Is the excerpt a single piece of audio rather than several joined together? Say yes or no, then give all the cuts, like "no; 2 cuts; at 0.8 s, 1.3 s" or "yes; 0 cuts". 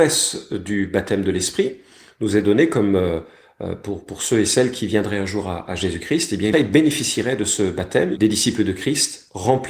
no; 2 cuts; at 6.5 s, 8.2 s